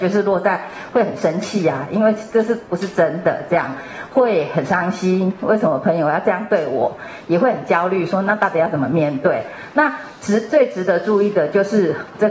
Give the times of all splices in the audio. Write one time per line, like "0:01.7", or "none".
none